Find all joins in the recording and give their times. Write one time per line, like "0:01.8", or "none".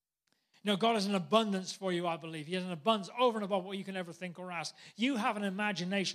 none